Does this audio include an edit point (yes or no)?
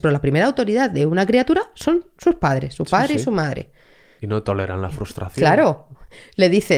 yes